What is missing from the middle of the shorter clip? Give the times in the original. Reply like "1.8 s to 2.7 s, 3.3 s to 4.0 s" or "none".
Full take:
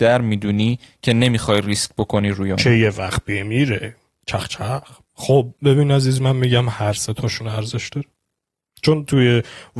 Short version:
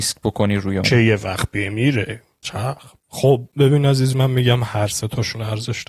4.2 s to 4.5 s